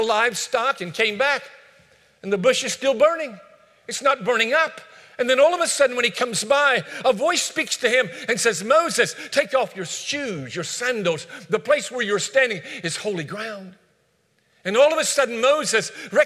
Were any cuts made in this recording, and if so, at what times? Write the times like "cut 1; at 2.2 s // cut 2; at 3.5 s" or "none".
none